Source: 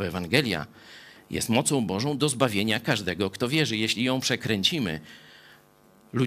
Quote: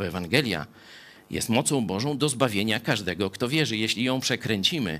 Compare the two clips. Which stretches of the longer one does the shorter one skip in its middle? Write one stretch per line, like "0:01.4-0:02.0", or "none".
none

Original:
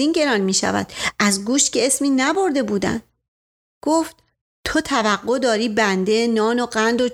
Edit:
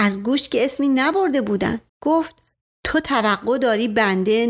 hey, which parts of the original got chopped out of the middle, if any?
0:03.1-0:03.7

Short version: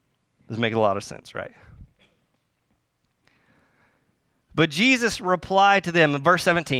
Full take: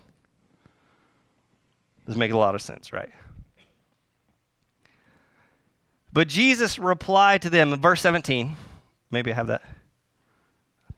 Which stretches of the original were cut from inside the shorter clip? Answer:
none

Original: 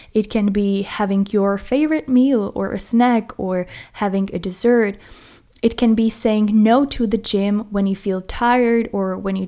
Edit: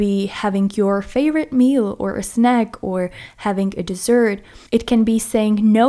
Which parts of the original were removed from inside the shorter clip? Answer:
0:05.2-0:05.6

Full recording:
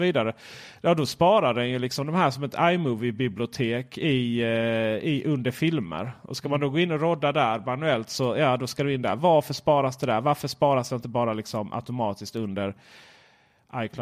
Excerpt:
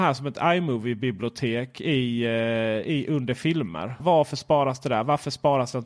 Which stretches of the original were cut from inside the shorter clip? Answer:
0:06.2-0:09.2

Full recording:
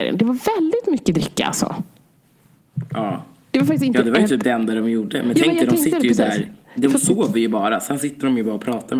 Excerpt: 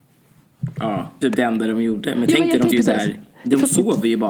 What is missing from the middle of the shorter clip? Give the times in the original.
0:03.4-0:04.3
0:05.8-0:06.0

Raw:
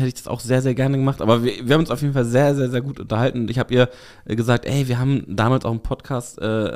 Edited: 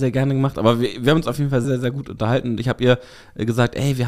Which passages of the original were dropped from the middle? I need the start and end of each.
0:02.3-0:02.5

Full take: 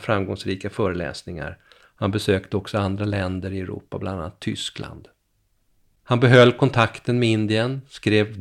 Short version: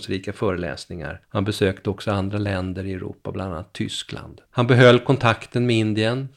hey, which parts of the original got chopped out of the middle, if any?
0:01.6-0:01.9
0:05.1-0:06.0

